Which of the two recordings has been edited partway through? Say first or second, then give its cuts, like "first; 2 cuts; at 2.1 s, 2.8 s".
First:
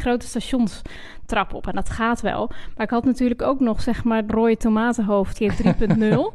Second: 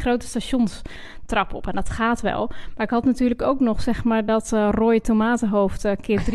first; 2 cuts; at 4.3 s, 5.4 s